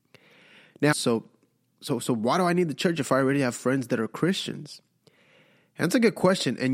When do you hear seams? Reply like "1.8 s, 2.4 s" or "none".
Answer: 0.9 s